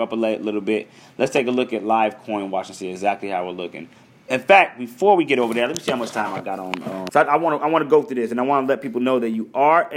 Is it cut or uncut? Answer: cut